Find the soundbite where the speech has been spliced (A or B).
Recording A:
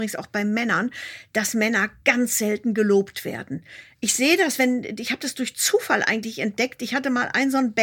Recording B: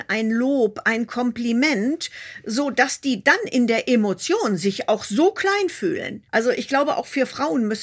B